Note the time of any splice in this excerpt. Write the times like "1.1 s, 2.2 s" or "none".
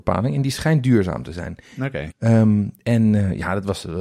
2.1 s